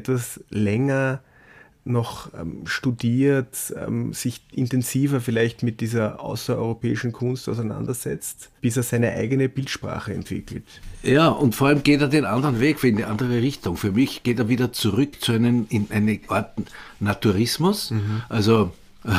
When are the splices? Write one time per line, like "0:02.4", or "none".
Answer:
0:08.6